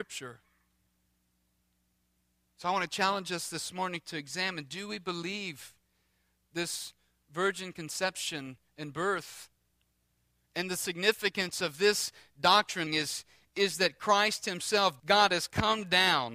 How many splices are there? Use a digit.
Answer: 2